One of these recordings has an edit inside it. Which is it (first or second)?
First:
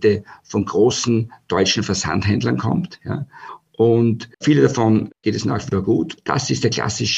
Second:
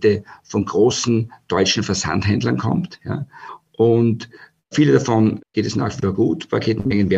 first